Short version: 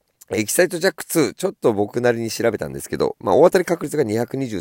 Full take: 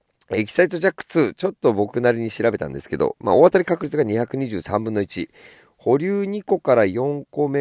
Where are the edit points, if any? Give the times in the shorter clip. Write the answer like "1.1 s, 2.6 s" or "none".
none